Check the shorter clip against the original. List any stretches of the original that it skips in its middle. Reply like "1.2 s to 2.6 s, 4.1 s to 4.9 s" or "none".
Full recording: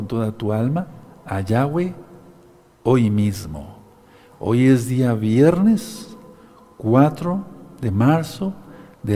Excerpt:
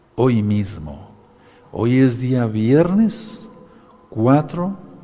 none

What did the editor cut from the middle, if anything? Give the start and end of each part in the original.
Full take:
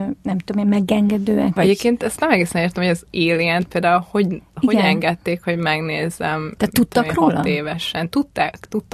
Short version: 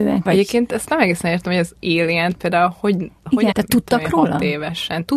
4.8 s to 6.5 s

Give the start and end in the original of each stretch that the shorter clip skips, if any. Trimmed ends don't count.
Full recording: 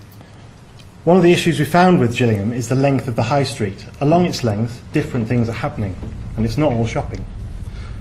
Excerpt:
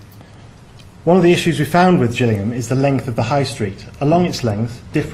none

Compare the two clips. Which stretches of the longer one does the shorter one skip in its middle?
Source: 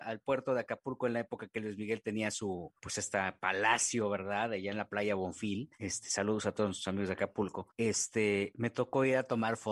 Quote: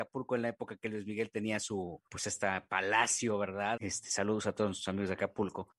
4.5 s to 5.8 s

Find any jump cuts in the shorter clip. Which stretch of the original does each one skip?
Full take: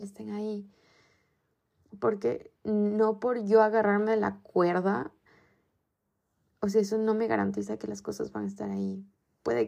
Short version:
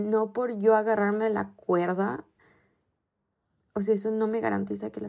none

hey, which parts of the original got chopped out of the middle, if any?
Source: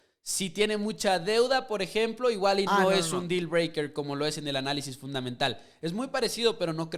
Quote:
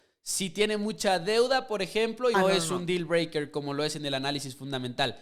2.3 s to 2.8 s

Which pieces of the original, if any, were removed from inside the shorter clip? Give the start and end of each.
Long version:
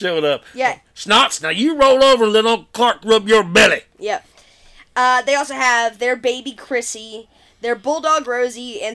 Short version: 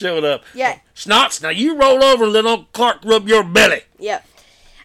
none

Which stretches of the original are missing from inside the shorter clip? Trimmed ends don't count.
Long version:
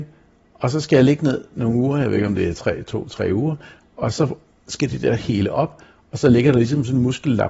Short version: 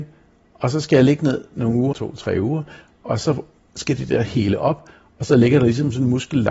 1.9 s to 2.8 s

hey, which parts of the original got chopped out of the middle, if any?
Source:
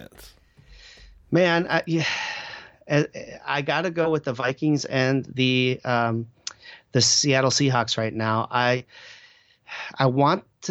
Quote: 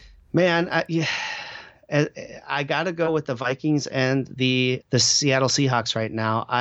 5.8 s to 6.8 s

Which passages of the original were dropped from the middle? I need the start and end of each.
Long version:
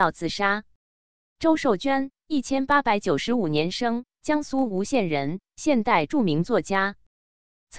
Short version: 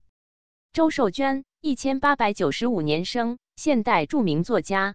4.1 s to 5.5 s

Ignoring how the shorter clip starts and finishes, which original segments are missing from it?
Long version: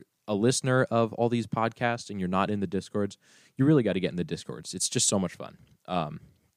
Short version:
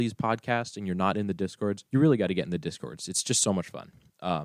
3.2 s to 3.5 s

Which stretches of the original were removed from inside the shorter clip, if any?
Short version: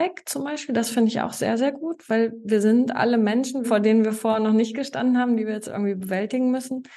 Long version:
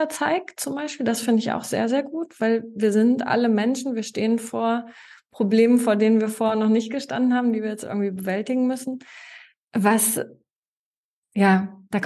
3.9 s to 5.8 s

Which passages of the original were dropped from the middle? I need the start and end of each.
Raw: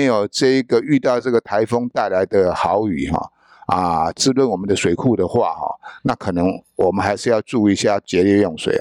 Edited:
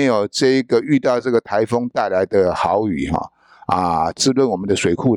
none

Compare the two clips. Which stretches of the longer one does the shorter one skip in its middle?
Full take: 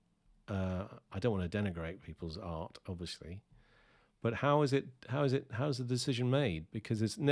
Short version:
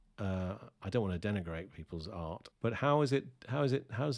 2.8 s to 4.1 s

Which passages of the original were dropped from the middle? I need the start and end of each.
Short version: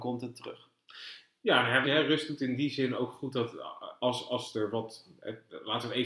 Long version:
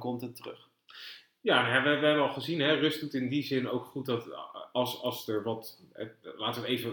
1.8 s to 2.6 s

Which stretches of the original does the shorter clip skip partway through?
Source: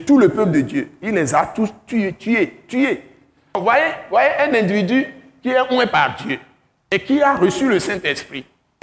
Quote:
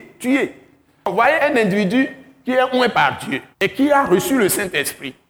3.8 s to 4.3 s, 6.5 s to 6.8 s

